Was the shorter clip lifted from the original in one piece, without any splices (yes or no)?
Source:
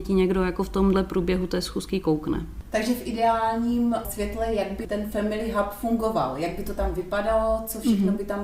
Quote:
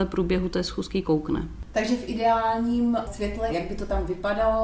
no